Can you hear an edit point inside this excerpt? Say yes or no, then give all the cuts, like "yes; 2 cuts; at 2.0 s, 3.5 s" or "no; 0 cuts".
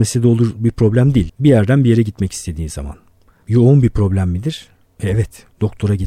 yes; 1 cut; at 1.3 s